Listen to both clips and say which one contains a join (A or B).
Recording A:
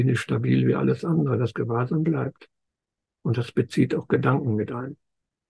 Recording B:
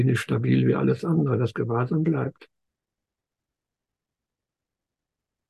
A